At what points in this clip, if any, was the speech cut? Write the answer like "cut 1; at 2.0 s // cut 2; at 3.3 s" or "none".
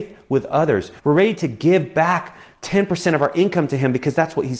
cut 1; at 1.0 s